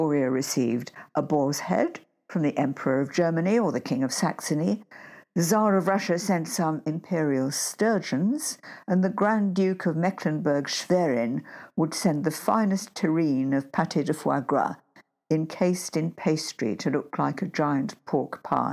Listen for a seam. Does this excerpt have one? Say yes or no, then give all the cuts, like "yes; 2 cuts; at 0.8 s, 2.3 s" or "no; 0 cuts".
no; 0 cuts